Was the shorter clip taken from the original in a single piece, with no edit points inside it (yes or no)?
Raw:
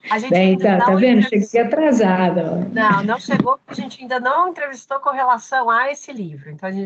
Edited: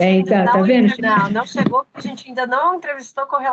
no